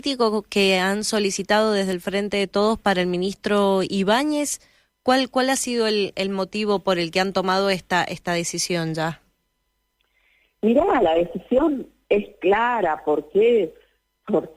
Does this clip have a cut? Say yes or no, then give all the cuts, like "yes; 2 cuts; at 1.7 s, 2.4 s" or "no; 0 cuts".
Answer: no; 0 cuts